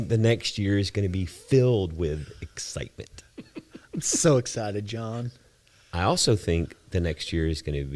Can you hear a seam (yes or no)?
no